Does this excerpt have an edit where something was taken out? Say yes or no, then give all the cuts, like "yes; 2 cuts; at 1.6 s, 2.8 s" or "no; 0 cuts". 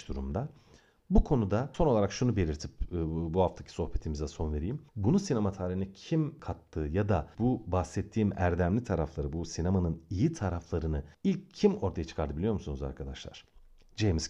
yes; 2 cuts; at 4.9 s, 11.1 s